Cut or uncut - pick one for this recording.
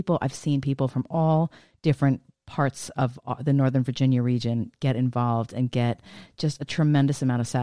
uncut